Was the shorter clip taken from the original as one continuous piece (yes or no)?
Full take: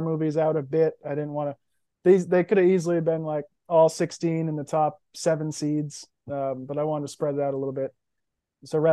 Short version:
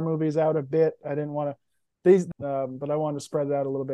no